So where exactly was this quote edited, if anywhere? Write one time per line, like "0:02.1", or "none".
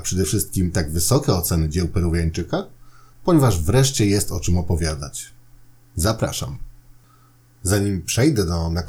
0:03.1